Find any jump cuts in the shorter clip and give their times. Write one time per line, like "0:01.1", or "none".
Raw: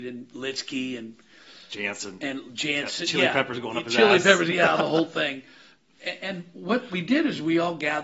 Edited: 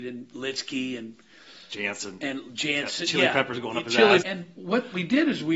0:04.2